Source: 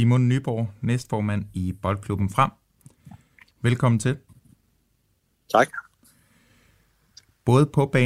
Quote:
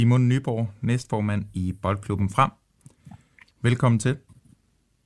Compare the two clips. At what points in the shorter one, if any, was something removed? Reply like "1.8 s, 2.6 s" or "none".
none